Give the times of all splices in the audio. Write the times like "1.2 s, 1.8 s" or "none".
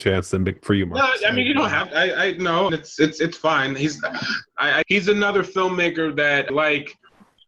2.7 s, 4.8 s, 6.5 s